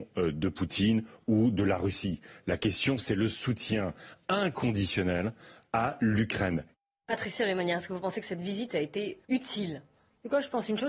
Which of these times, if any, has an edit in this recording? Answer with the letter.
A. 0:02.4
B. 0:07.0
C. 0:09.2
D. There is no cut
C